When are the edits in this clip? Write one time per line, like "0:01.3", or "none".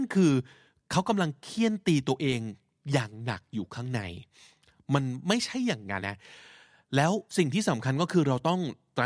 0:06.0
0:07.3